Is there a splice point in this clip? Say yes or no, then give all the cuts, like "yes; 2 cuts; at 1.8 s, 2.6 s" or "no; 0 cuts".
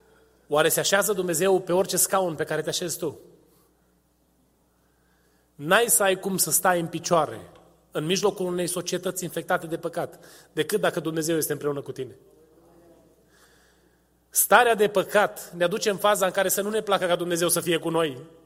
no; 0 cuts